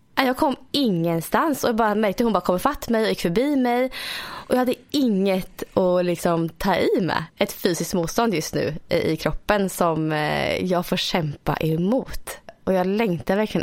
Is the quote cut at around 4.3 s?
no; 1 cut; at 7.3 s

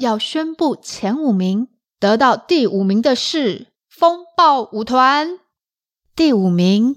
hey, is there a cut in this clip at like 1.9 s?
yes; 2 cuts; at 1.9 s, 3.8 s

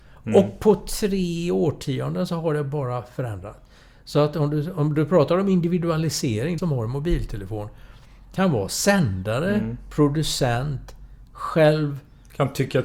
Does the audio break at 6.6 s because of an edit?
yes; 1 cut; at 6.6 s

